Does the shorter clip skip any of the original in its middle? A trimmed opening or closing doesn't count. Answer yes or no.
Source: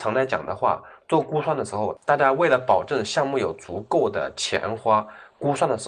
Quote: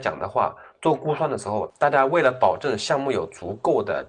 no